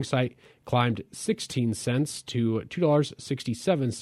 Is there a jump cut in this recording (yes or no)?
no